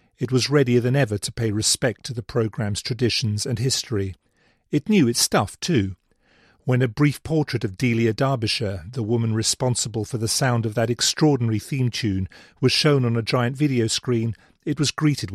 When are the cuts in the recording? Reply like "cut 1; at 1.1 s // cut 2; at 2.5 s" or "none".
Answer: none

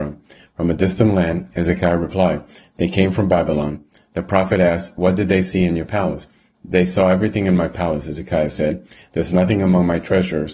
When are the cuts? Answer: none

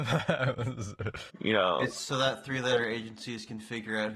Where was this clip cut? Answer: cut 1; at 1.3 s

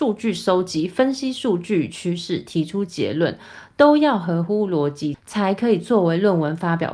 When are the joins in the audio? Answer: none

